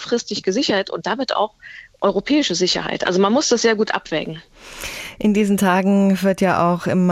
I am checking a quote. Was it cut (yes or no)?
no